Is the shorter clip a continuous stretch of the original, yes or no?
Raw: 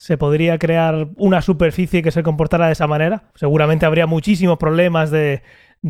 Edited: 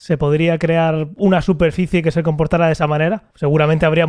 yes